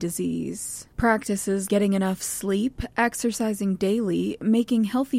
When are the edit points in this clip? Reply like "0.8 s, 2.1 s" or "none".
1.7 s